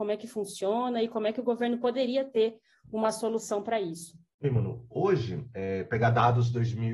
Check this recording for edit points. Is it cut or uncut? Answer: uncut